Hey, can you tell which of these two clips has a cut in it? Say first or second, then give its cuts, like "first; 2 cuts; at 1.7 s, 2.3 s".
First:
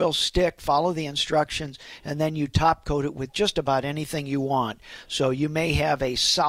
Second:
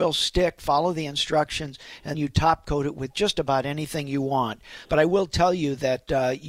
second; 2 cuts; at 2.1 s, 4.9 s